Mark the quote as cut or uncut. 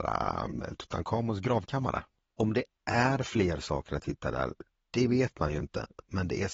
uncut